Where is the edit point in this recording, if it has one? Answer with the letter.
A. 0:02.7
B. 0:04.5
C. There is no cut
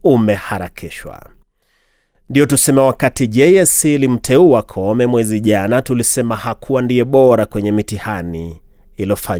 C